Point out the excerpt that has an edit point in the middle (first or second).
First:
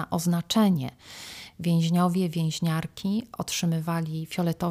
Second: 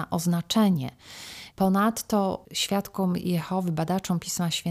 second